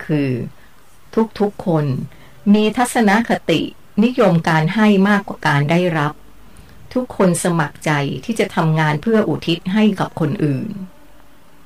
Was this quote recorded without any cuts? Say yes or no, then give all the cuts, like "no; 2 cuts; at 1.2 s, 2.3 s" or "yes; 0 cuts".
yes; 0 cuts